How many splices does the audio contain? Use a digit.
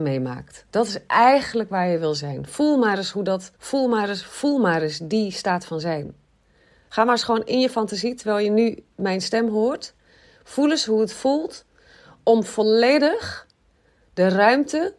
1